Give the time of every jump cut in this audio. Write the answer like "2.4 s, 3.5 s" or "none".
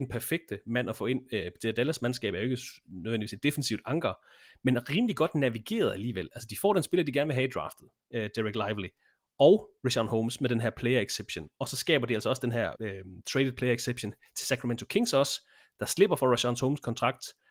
12.7 s